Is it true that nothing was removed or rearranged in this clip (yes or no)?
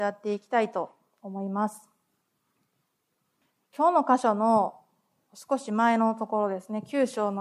yes